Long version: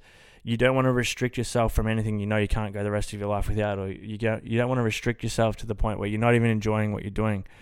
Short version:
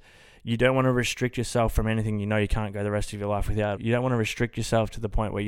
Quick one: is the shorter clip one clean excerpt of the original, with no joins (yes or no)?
no